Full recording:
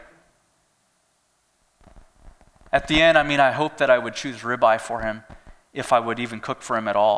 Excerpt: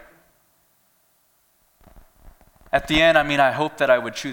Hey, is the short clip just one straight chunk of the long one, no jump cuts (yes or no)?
yes